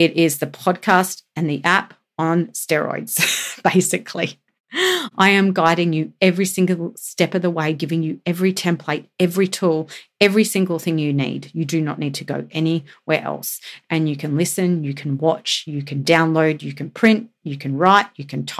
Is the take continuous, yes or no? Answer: yes